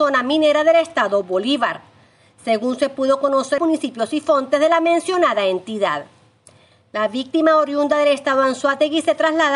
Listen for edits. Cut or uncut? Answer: cut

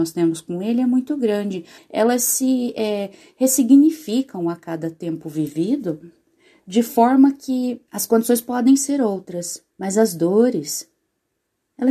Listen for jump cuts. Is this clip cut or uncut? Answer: cut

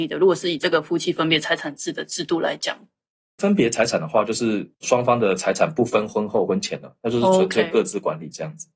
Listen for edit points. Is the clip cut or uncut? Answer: uncut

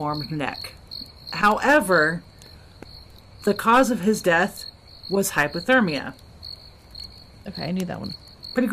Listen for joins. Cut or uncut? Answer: uncut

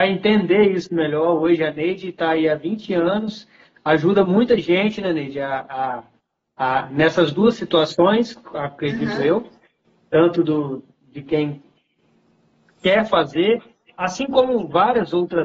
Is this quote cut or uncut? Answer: cut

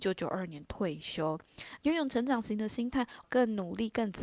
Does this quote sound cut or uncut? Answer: cut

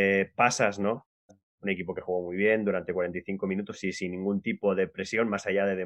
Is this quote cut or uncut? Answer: cut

